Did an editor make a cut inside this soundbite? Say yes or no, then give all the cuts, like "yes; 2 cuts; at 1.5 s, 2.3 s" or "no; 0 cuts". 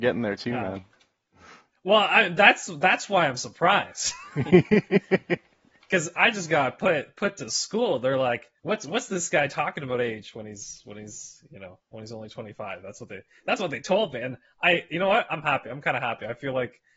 yes; 1 cut; at 8.6 s